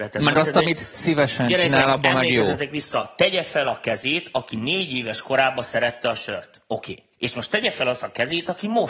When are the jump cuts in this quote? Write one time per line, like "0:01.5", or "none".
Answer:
0:07.1

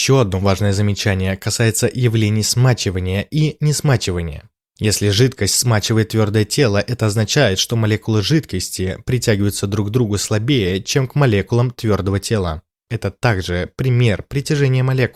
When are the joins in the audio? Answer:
0:12.9

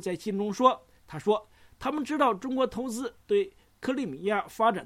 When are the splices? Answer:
0:01.0

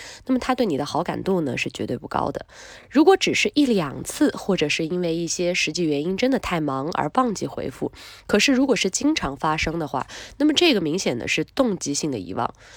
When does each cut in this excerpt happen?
none

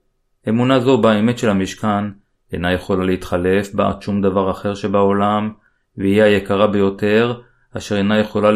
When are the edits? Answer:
none

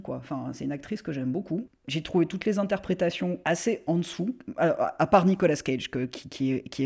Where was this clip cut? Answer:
0:03.4

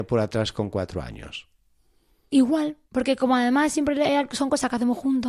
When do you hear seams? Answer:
0:02.9

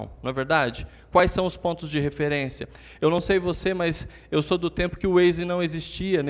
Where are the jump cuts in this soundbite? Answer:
none

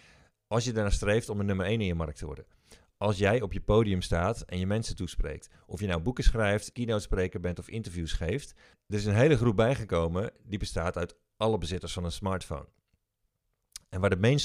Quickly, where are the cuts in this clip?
0:06.7
0:08.7

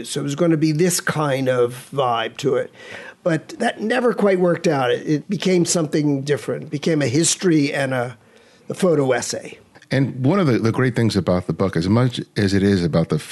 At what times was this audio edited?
none

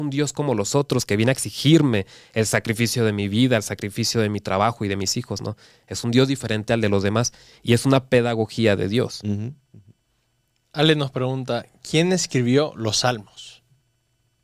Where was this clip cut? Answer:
none

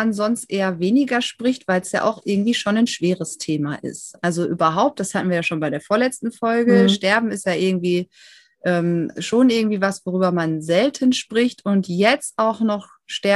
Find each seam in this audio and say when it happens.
none

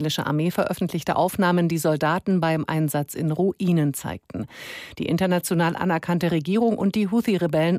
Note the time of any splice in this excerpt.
0:04.9

